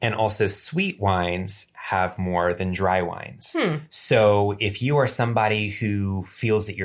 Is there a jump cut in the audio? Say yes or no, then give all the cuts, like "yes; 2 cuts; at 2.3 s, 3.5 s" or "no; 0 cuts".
no; 0 cuts